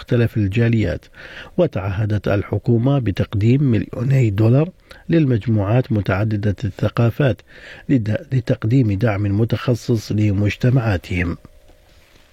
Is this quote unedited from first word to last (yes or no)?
yes